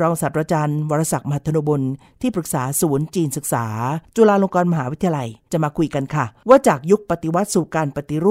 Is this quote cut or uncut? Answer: uncut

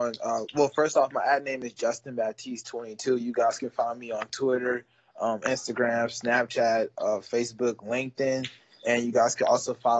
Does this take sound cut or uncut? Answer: uncut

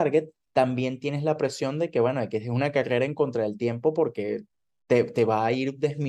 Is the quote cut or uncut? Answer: uncut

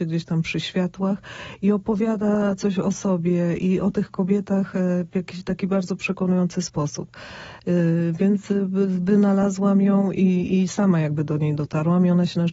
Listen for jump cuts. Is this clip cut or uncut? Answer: uncut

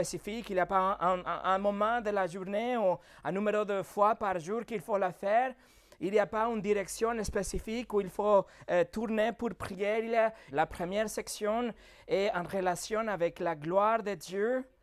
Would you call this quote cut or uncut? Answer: cut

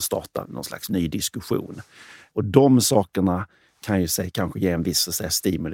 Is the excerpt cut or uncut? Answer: uncut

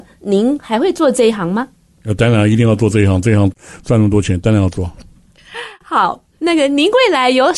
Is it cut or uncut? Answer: uncut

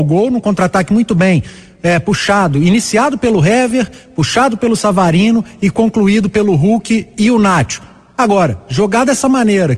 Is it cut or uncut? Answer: uncut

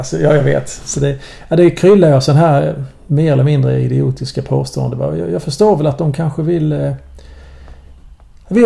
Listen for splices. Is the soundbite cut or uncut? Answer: uncut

